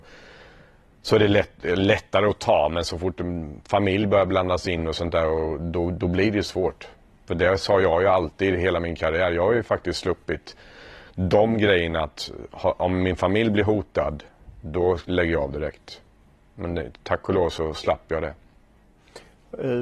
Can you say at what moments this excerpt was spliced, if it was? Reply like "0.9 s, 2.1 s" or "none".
none